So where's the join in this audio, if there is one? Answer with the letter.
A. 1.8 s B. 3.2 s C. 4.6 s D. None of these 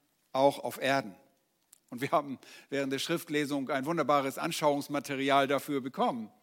A